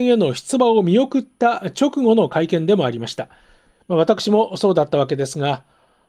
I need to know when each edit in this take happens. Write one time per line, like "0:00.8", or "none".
0:03.8

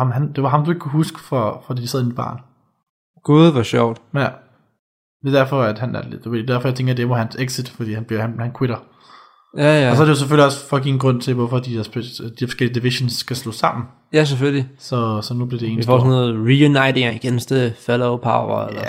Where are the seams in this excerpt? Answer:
none

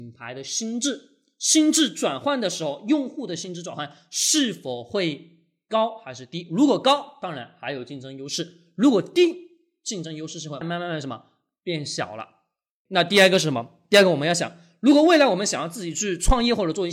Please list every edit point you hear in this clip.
0:10.6
0:12.9

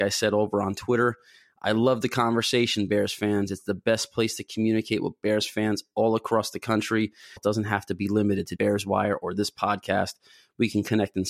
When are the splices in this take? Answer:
0:07.4
0:08.6

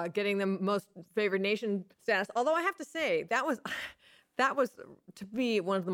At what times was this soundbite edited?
0:01.9

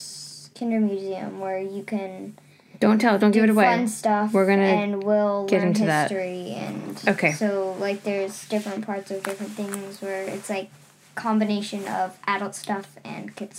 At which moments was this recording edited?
none

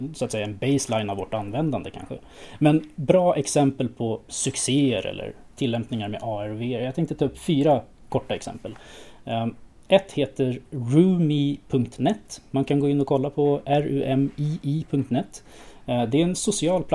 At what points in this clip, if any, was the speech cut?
0:04.3

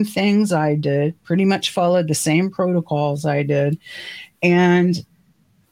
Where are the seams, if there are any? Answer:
none

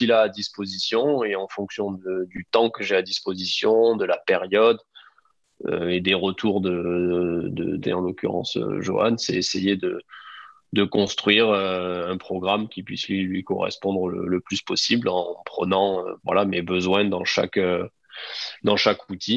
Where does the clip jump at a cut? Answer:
0:07.8
0:16.2

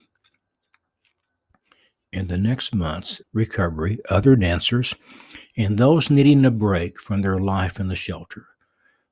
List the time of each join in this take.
0:03.2

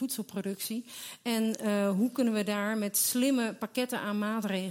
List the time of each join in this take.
none

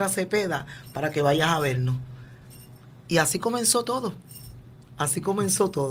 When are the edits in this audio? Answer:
none

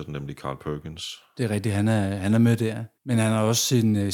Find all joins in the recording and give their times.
0:03.0

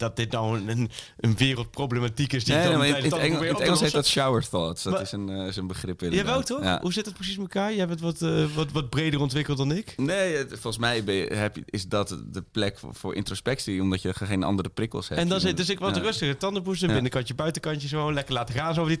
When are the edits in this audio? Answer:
none

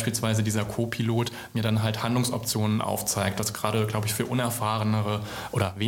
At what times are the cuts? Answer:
none

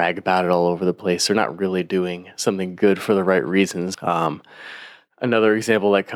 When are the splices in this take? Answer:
0:03.9

